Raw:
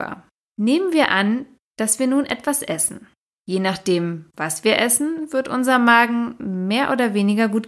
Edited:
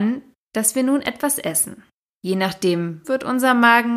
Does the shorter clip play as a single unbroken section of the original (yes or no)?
no